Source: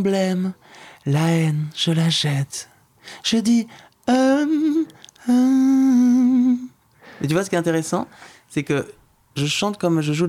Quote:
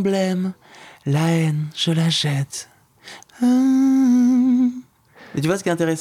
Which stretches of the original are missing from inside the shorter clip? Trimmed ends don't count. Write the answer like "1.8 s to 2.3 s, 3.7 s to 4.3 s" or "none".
3.2 s to 5.1 s